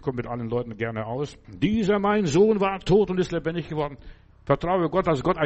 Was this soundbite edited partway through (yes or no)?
yes